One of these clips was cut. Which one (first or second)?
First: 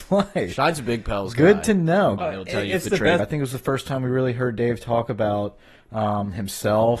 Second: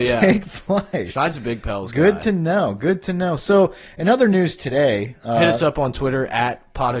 first